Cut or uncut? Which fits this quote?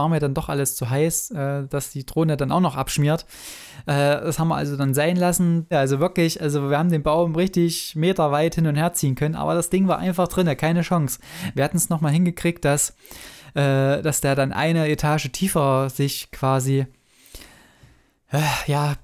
cut